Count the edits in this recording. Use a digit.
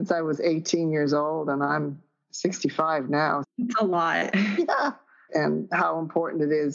2